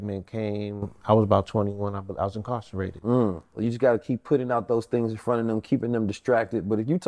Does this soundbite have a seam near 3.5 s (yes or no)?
yes